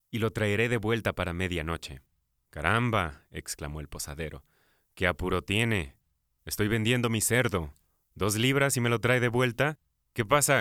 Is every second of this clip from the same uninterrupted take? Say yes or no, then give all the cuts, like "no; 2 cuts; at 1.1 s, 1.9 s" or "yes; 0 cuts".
yes; 0 cuts